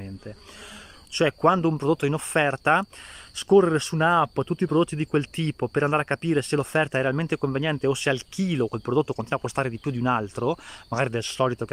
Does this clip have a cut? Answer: yes; 1 cut; at 1.0 s

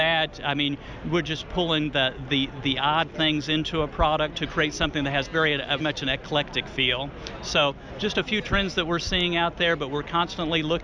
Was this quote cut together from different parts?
yes; 1 cut; at 5.8 s

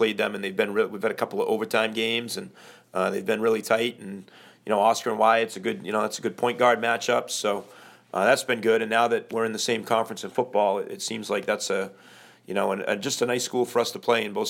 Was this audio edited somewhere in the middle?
no; 0 cuts

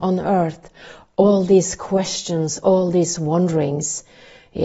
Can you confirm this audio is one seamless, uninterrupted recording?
yes; 0 cuts

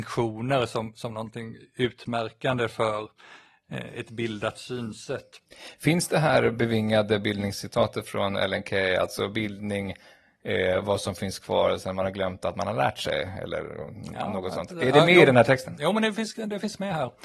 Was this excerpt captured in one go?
yes; 0 cuts

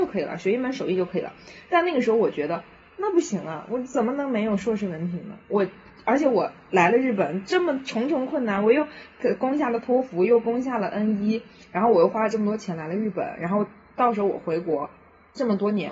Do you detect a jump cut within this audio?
no; 0 cuts

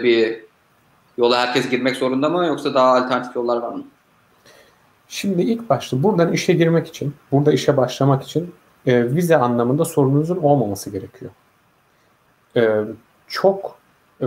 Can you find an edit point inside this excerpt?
no; 0 cuts

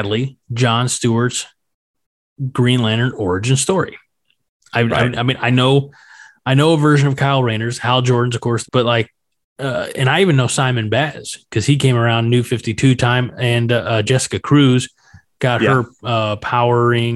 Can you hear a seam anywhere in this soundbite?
yes; 1 cut; at 8.6 s

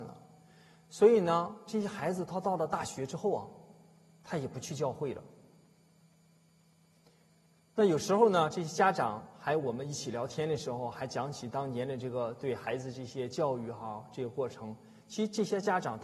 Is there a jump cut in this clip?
no; 0 cuts

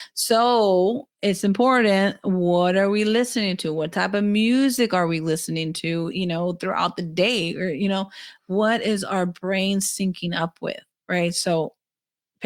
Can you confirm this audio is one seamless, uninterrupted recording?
no; 3 cuts; at 1.1 s, 6.1 s, 8.4 s

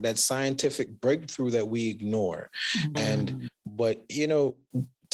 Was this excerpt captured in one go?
no; 1 cut; at 2.9 s

